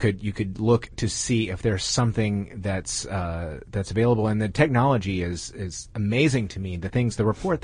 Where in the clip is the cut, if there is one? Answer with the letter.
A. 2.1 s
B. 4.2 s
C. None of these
C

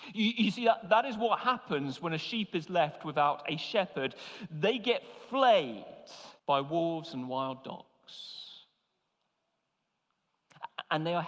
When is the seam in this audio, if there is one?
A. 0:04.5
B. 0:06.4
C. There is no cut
B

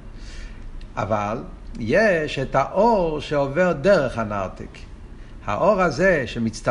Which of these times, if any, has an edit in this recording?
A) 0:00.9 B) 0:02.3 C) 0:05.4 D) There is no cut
D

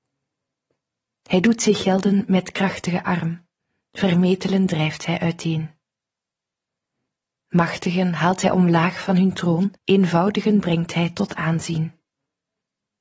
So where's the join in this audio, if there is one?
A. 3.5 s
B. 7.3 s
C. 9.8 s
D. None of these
C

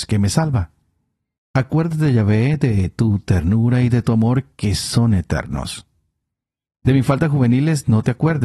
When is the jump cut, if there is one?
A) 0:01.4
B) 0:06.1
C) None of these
A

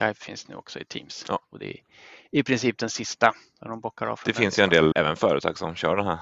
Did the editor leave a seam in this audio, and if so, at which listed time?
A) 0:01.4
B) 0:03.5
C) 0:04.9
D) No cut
C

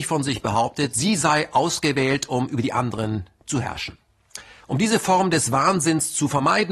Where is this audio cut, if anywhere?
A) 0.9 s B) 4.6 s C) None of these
B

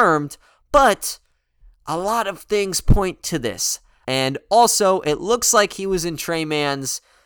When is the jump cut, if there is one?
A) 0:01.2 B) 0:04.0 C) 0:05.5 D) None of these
B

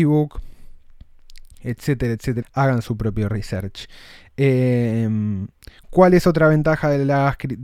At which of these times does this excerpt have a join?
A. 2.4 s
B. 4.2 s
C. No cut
A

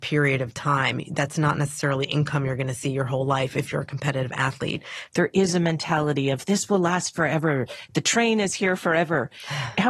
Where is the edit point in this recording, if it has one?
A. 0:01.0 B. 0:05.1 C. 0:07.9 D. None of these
B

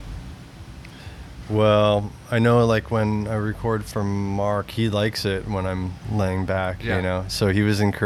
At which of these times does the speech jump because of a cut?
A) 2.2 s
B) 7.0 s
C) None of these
C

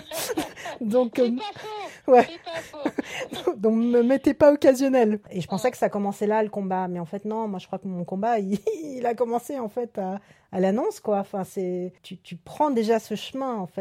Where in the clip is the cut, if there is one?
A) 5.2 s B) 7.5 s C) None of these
A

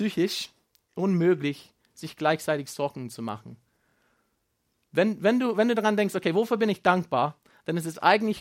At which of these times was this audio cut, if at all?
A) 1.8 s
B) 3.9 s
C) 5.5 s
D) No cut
D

